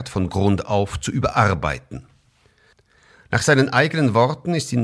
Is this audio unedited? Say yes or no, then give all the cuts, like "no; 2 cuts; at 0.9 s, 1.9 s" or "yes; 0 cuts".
yes; 0 cuts